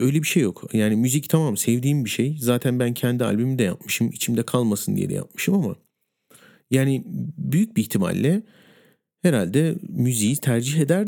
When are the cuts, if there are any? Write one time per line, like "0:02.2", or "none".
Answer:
none

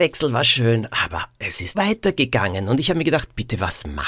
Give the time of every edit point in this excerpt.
0:01.7

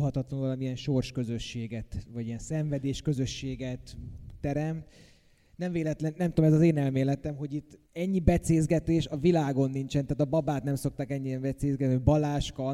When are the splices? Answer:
0:07.9

